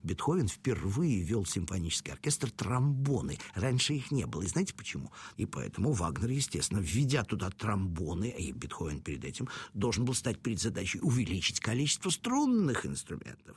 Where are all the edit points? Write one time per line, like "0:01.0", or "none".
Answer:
0:05.3